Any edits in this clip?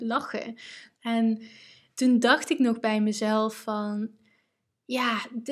yes; 1 cut; at 0.9 s

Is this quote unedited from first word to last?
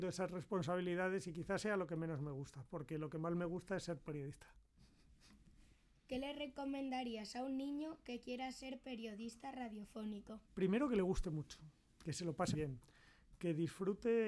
no; 2 cuts; at 10.5 s, 12.5 s

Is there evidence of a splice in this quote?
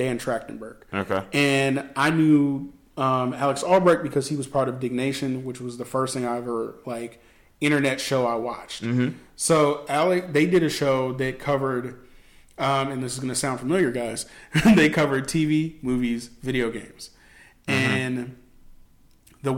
no; 0 cuts

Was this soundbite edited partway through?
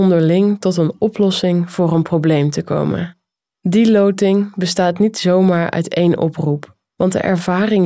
no; 0 cuts

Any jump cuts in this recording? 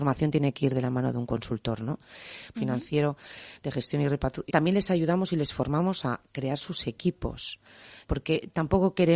yes; 3 cuts; at 2.5 s, 4.5 s, 8.0 s

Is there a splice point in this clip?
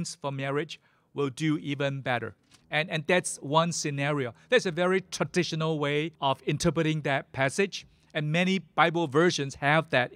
yes; 2 cuts; at 2.6 s, 6.2 s

